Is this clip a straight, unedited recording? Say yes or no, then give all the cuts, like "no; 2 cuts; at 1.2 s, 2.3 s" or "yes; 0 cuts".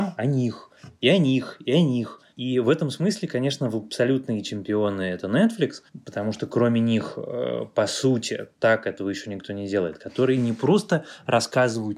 yes; 0 cuts